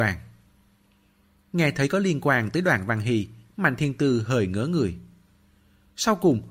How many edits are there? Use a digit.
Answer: 0